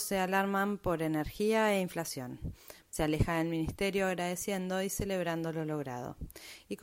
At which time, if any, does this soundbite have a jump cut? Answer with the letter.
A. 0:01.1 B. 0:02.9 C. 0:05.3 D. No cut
B